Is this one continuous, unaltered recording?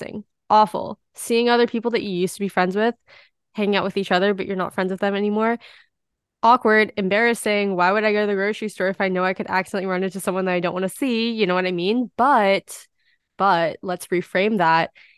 yes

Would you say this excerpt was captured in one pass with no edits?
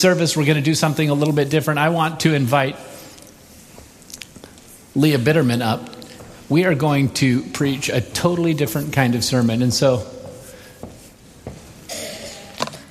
yes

